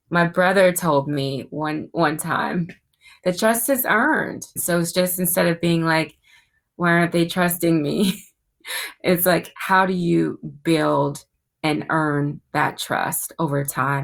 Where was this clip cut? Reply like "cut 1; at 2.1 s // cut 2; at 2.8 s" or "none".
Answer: cut 1; at 4.6 s